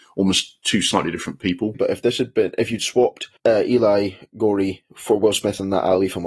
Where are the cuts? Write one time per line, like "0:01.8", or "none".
0:01.7
0:03.4